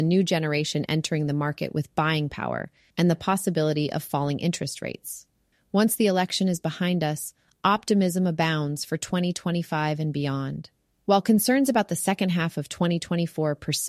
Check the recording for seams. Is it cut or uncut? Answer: cut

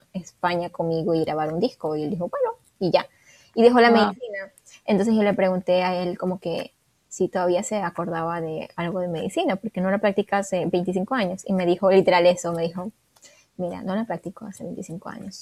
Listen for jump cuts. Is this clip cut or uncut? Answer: uncut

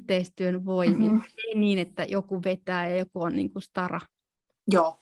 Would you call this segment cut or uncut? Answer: uncut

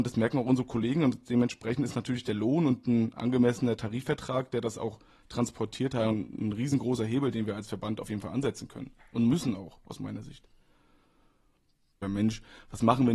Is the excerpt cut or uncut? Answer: cut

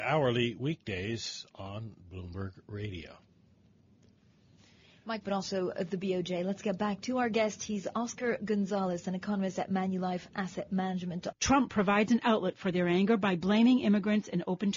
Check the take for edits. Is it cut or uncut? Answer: cut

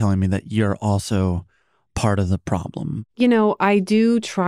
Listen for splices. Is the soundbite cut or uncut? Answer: cut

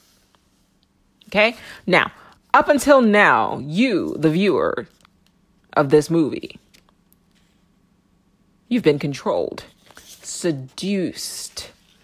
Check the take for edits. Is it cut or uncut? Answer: uncut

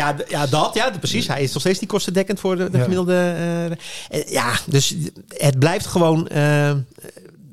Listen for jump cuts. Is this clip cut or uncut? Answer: uncut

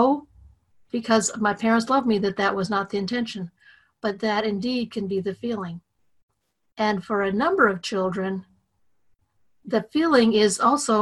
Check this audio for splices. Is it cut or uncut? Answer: uncut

